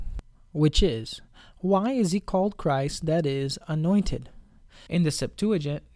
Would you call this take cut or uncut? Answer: cut